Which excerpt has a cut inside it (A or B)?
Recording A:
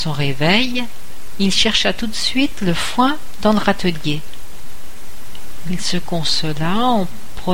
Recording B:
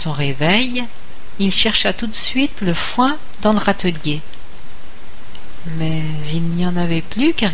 A